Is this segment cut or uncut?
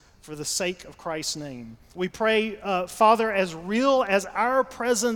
cut